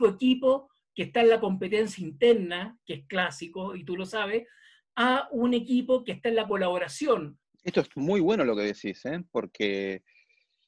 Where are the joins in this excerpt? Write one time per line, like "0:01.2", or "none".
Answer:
0:07.4